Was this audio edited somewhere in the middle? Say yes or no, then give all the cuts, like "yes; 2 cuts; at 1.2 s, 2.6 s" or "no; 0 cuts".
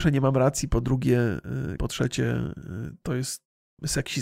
yes; 1 cut; at 1.8 s